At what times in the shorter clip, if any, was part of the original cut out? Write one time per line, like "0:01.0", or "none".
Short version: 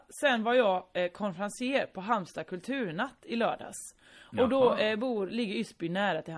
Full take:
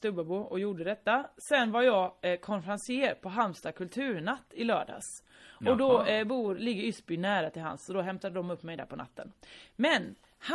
none